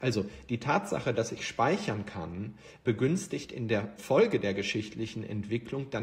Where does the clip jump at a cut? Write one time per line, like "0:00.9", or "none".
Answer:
none